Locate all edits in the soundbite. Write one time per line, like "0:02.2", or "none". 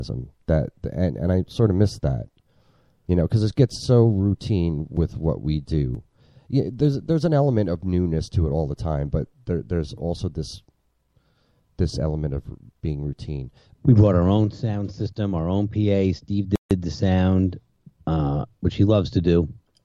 0:13.8